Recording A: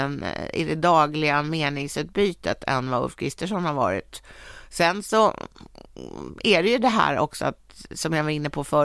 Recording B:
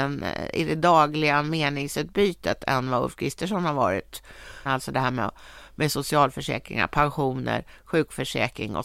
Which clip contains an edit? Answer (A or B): B